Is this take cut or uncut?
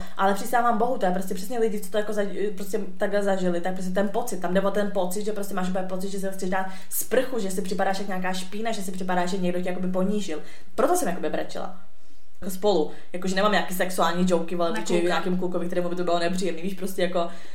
cut